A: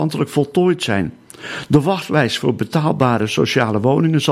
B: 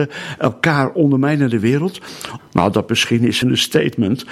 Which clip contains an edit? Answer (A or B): B